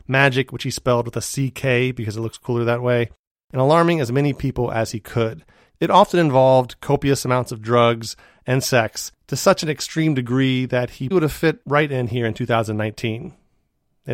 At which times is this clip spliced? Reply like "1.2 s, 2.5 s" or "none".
5.7 s, 11.1 s